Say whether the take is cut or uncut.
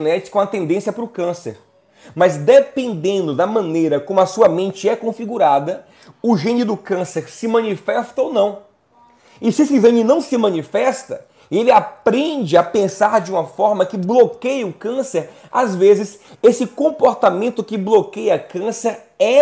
uncut